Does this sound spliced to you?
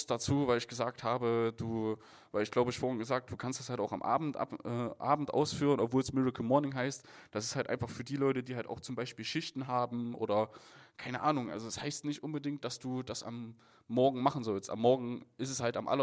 no; 0 cuts

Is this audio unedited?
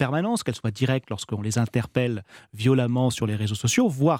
yes; 0 cuts

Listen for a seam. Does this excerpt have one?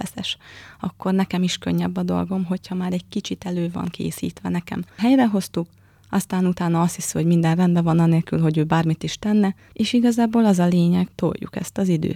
yes; 3 cuts; at 4.9 s, 9.7 s, 11.1 s

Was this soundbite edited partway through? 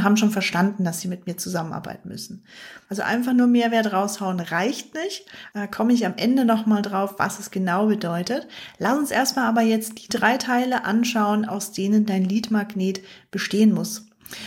yes; 2 cuts; at 2.9 s, 5.5 s

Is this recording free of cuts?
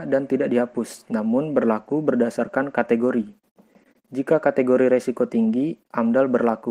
yes; 0 cuts

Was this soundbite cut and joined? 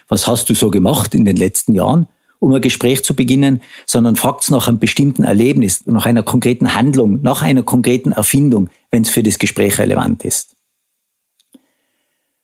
no; 0 cuts

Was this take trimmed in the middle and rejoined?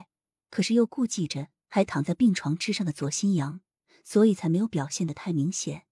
no; 0 cuts

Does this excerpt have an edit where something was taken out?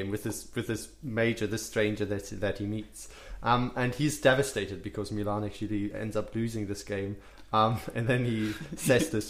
no; 0 cuts

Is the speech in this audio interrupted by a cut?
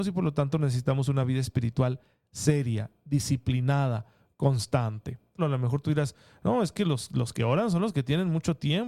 yes; 1 cut; at 5.4 s

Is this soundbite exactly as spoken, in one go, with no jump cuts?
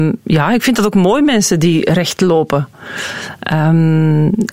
yes; 0 cuts

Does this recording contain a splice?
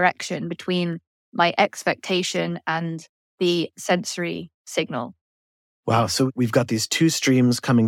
no; 0 cuts

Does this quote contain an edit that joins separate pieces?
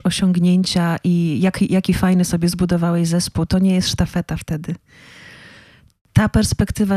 no; 0 cuts

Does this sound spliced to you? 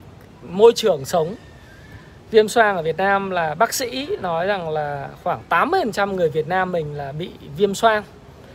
yes; 1 cut; at 2.2 s

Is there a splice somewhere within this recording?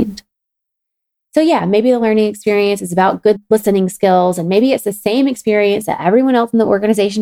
no; 0 cuts

